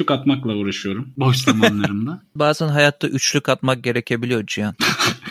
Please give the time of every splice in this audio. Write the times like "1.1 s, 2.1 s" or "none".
2.4 s